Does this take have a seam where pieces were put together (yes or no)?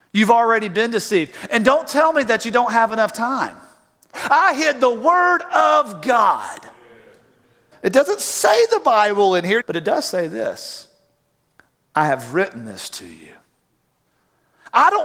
yes